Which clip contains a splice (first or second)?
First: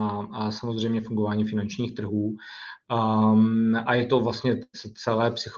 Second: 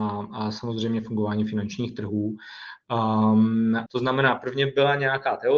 second